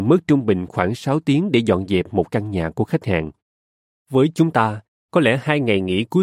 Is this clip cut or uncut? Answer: uncut